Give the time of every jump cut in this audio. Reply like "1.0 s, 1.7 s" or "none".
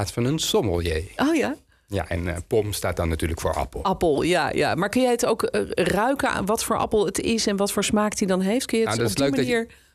none